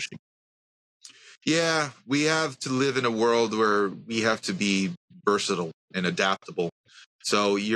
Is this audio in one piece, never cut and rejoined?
yes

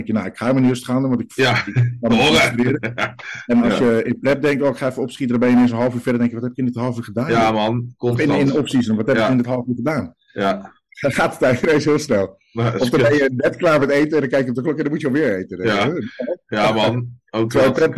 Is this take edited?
no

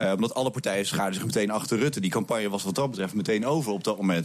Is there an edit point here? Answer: no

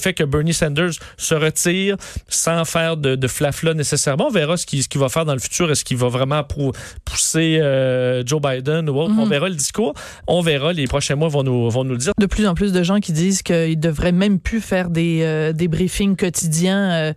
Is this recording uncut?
no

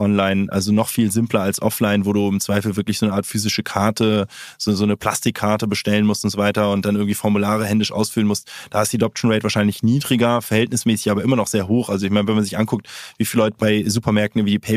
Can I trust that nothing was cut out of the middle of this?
yes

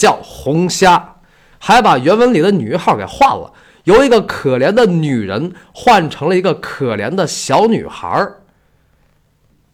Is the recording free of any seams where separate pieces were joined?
no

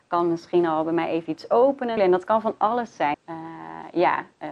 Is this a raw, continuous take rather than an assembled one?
no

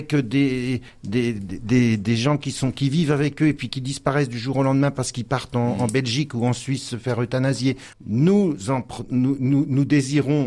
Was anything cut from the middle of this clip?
yes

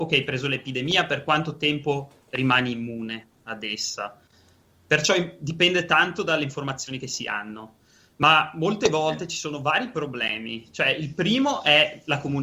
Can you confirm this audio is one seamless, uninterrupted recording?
yes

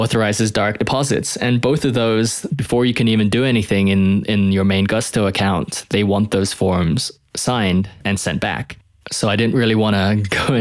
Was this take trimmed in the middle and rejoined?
no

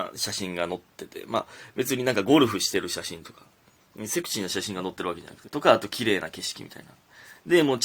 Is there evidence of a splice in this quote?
yes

